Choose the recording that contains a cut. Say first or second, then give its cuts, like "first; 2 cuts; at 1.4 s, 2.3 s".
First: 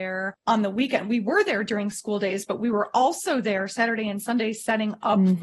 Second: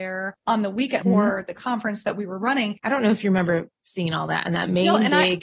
second; 2 cuts; at 1.0 s, 2.8 s